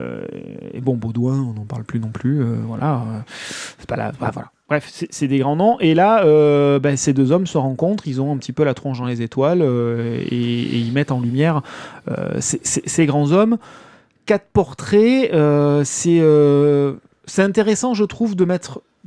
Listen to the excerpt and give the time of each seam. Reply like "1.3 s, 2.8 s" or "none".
none